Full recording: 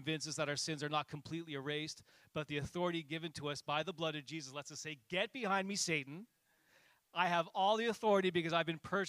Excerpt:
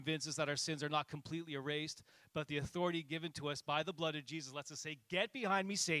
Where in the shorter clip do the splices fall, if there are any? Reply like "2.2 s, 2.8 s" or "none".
none